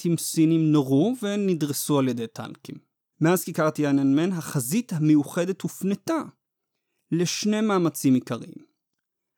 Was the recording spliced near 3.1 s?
yes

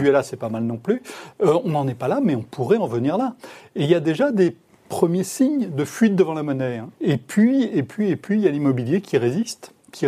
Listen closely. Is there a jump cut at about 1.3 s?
no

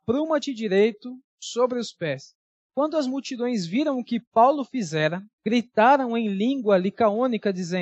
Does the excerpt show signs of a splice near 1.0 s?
no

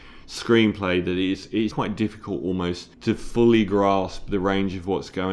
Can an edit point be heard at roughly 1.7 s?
yes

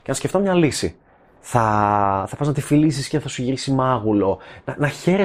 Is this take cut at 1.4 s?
yes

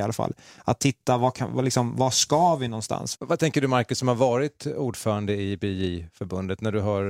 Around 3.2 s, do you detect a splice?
yes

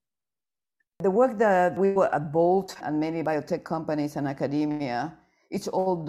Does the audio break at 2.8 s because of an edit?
yes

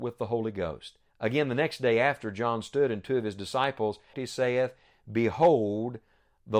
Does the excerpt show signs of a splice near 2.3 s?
no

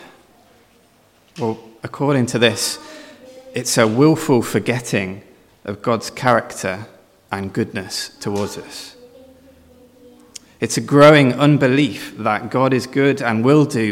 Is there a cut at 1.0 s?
no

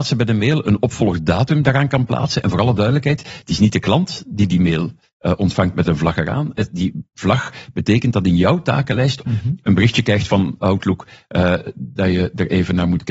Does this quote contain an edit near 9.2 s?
yes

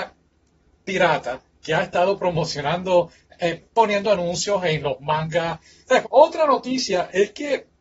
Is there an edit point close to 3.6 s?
yes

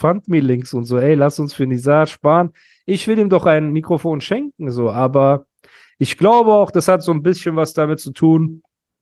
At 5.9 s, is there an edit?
no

